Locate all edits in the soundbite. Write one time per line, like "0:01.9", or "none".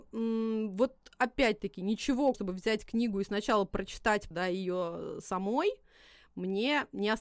0:02.3
0:04.3

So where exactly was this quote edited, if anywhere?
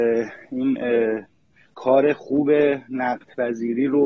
none

